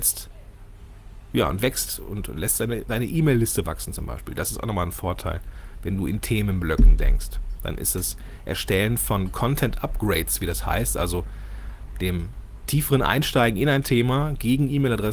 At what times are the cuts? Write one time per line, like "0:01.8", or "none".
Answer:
none